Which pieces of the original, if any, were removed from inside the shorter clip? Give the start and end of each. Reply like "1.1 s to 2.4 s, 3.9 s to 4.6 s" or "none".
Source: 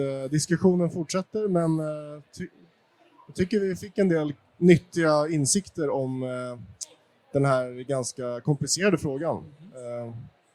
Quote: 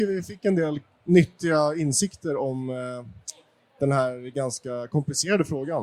none

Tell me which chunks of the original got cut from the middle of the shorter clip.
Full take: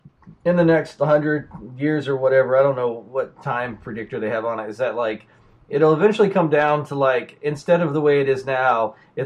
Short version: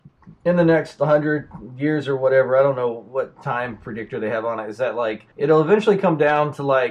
5.3 s to 5.6 s

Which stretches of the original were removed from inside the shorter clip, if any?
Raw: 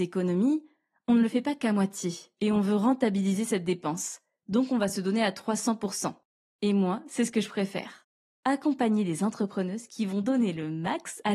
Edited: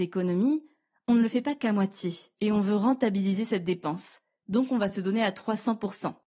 none

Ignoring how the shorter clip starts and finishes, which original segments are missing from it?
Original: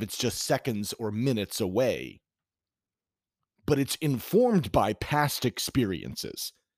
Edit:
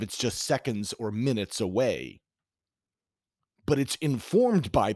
none

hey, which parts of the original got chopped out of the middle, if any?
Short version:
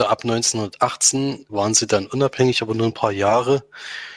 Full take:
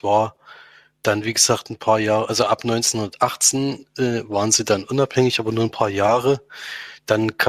3.9 s to 4.3 s

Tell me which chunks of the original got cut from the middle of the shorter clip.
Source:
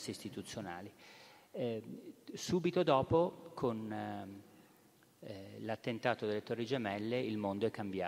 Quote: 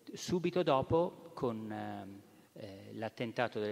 4.7 s to 5.1 s

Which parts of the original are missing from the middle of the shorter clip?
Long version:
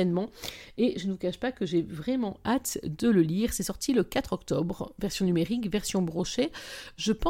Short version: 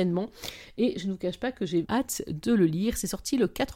1.8 s to 2.4 s

